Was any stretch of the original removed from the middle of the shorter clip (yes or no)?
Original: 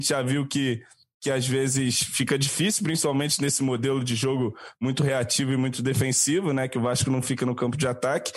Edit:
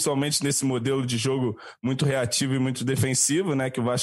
no